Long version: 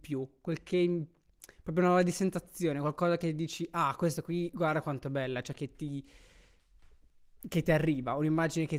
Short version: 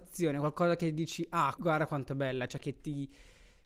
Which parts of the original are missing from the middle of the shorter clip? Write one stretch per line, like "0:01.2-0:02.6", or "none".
0:04.0-0:04.5